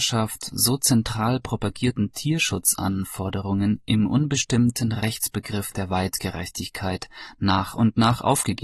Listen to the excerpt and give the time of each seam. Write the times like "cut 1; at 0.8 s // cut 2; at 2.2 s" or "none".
none

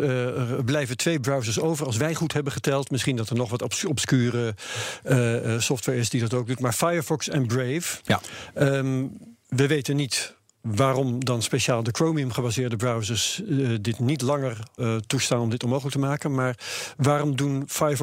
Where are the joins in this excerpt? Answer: cut 1; at 14.8 s

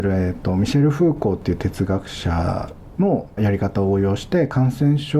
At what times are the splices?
cut 1; at 3.4 s

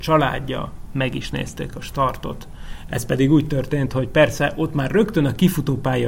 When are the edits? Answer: cut 1; at 2.9 s

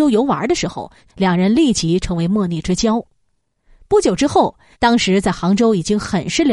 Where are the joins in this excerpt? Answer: cut 1; at 1.1 s // cut 2; at 4.7 s

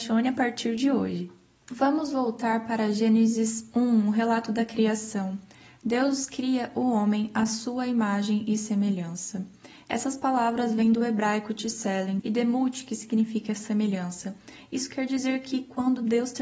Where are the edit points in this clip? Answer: cut 1; at 12.2 s

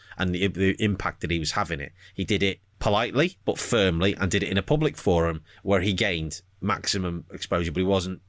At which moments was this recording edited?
cut 1; at 3.4 s

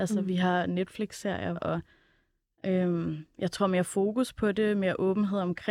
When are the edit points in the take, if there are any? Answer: cut 1; at 1.6 s

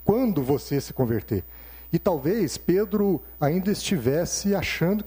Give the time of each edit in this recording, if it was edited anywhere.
none

